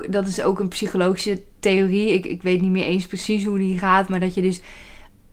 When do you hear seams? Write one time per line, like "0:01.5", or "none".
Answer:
none